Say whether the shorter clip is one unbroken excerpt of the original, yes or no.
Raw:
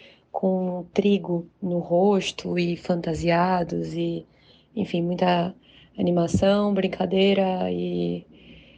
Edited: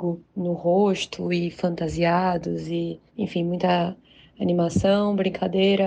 no